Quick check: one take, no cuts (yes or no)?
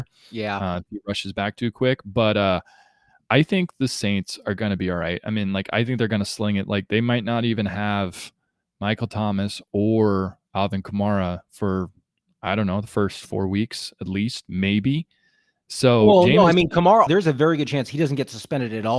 no